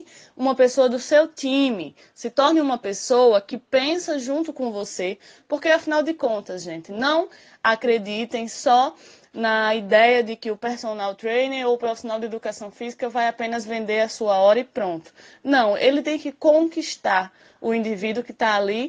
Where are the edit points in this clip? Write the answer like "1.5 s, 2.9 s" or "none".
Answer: none